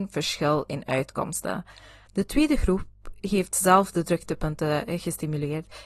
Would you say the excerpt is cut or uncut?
cut